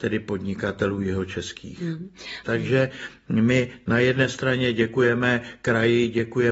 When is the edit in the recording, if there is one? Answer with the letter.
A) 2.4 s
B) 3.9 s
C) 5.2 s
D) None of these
A